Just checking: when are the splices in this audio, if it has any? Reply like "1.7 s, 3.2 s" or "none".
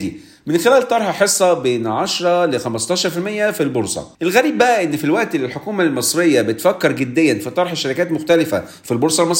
4.1 s